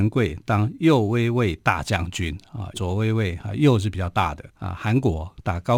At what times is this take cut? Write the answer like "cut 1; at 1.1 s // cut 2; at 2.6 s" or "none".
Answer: cut 1; at 2.7 s // cut 2; at 4.5 s